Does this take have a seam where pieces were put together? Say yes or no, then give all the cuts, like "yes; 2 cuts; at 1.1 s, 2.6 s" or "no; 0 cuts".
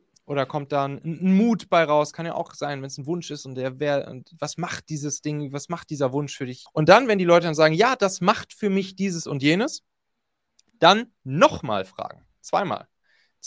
yes; 1 cut; at 6.7 s